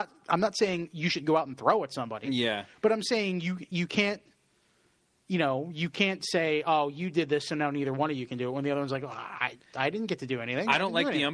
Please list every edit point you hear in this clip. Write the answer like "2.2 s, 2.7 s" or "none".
none